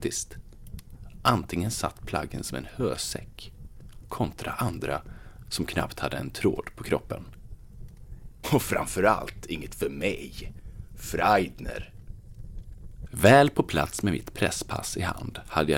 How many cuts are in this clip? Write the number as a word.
two